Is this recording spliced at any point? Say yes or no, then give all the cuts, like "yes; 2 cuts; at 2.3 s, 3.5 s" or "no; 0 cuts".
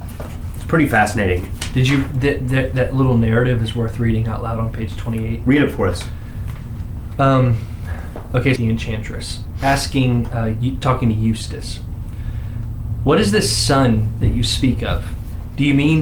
yes; 1 cut; at 8.6 s